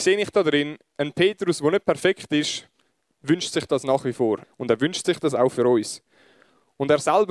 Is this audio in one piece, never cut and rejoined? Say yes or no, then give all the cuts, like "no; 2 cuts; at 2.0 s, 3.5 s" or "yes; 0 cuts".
no; 1 cut; at 4.4 s